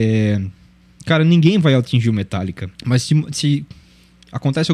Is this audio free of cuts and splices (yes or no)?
no